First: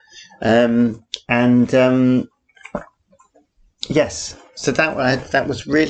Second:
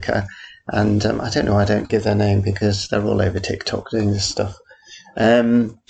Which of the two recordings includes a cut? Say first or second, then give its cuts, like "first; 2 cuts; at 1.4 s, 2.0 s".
second; 1 cut; at 1.9 s